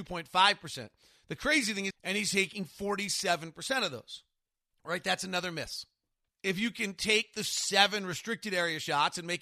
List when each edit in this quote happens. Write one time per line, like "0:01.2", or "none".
0:01.9
0:04.7
0:06.3